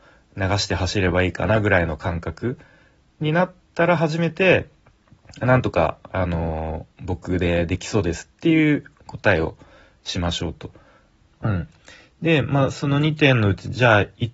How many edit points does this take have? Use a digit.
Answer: 1